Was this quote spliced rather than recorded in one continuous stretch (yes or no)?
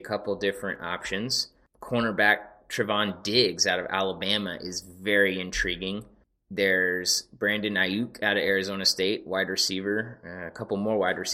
no